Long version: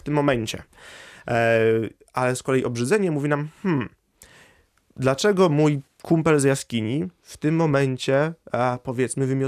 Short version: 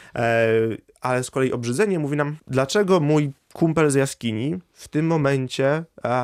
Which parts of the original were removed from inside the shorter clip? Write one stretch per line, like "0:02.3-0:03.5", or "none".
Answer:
0:03.5-0:04.9